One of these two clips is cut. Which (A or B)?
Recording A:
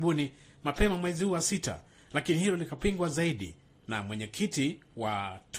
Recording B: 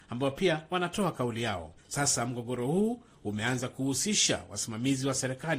B